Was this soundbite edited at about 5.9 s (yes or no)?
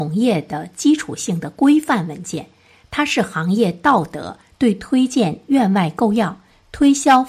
no